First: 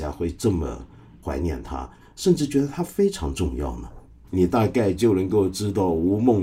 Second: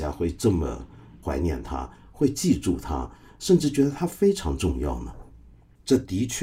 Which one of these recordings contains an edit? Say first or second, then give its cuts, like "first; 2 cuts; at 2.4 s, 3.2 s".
first; 2 cuts; at 2.0 s, 4.2 s